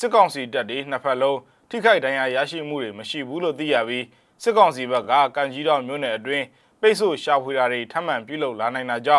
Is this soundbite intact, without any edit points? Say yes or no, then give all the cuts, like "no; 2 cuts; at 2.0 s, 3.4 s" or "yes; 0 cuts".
yes; 0 cuts